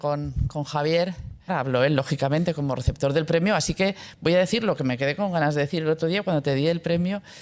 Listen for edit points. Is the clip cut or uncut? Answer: cut